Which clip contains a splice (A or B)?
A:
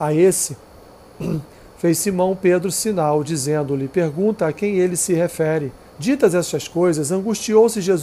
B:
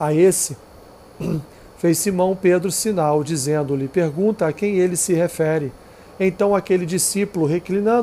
A